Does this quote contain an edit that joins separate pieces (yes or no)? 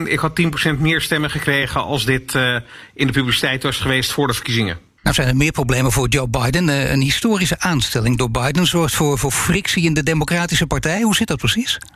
no